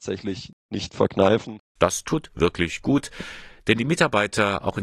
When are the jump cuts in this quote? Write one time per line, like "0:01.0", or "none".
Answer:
none